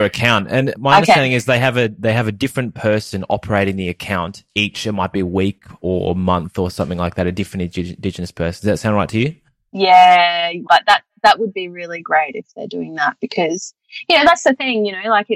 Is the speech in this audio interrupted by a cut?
yes; 1 cut; at 10.7 s

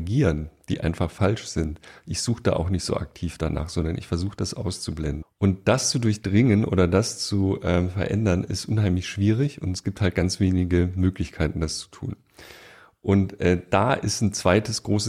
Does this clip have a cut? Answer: yes; 1 cut; at 5.2 s

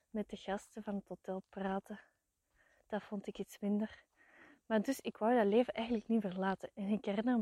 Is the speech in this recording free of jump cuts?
yes; 0 cuts

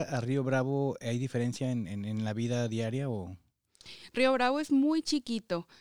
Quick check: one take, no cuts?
yes; 0 cuts

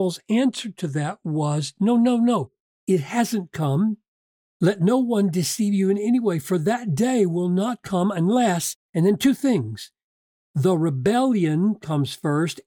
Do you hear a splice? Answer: no; 0 cuts

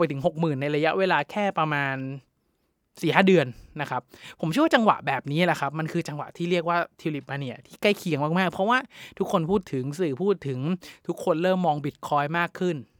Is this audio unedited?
yes; 0 cuts

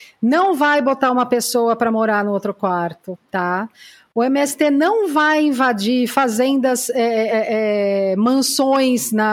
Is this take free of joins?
no; 1 cut; at 7.3 s

